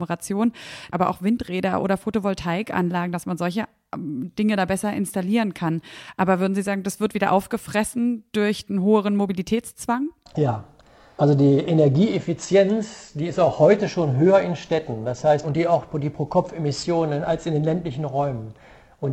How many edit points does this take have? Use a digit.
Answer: 2